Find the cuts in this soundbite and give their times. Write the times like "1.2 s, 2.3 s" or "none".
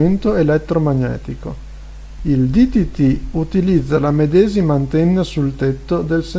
2.2 s